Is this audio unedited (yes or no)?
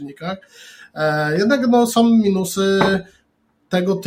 yes